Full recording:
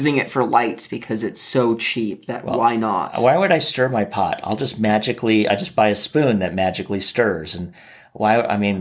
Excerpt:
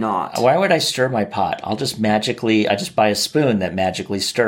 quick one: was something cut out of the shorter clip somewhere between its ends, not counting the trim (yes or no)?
no